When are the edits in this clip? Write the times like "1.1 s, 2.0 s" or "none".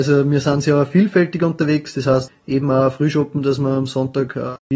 2.3 s

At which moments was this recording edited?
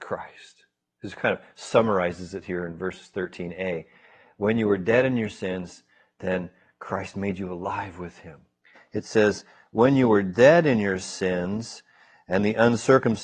8.7 s

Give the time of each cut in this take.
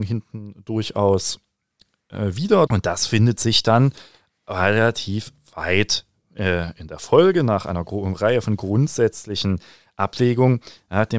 2.7 s

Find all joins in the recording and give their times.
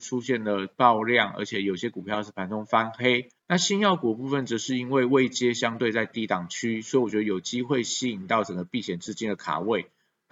3.4 s

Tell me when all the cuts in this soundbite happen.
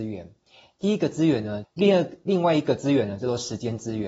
1.6 s

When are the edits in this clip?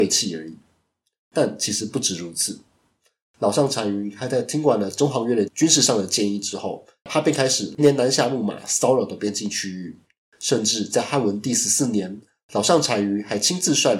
7.8 s

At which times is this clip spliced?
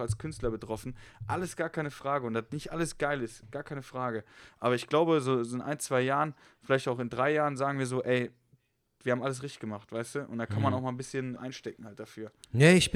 11.4 s

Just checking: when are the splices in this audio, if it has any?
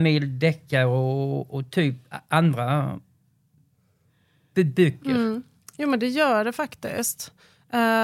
none

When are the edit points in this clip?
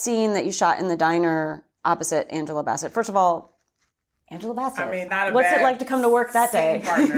5.1 s

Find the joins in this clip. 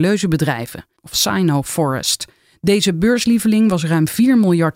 1.0 s

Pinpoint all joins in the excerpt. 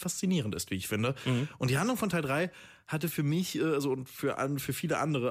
none

